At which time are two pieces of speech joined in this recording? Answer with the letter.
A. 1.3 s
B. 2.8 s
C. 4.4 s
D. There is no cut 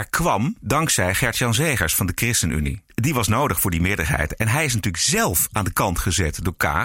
D